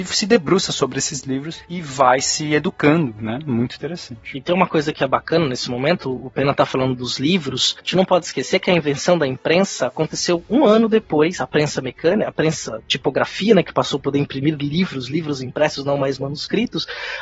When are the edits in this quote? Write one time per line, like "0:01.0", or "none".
none